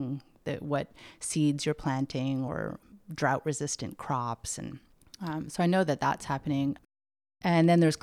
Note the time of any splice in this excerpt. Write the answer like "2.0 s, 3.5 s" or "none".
none